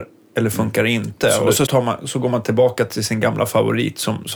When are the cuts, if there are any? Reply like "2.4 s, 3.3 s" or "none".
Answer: 1.7 s